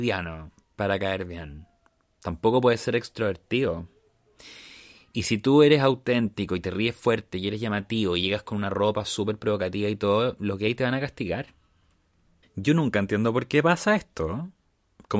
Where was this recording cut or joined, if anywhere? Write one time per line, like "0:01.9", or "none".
0:12.4